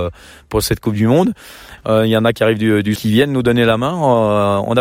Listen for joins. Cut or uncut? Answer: cut